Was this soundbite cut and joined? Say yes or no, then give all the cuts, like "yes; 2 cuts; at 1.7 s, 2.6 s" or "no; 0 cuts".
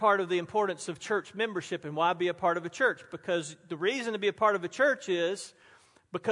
no; 0 cuts